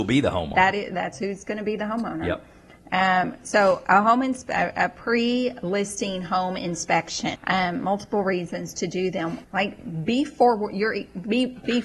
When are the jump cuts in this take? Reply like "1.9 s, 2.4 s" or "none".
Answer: 7.3 s, 9.4 s